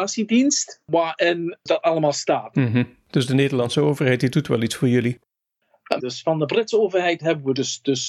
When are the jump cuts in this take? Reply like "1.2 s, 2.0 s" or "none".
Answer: 2.5 s, 6.0 s